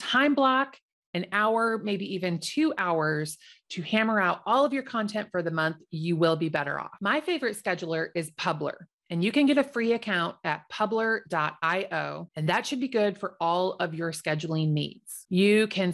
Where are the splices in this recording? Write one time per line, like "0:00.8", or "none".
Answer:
none